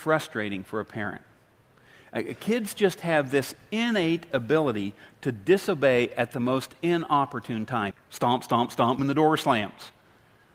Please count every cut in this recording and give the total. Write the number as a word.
two